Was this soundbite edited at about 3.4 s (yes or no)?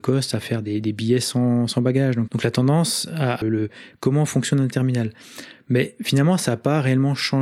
yes